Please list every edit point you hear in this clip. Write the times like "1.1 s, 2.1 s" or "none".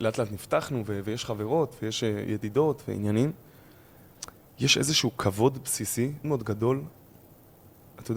6.2 s